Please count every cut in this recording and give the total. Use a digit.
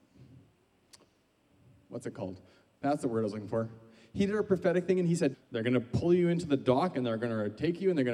2